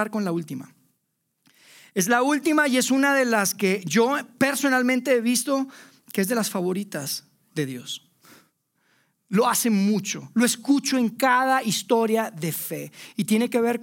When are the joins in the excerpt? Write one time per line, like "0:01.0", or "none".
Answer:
none